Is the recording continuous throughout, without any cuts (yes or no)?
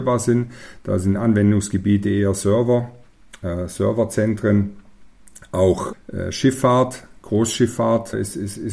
yes